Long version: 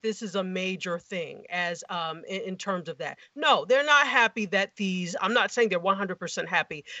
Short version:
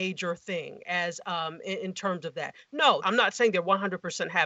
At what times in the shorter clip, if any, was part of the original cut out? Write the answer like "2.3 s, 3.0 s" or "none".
3.0 s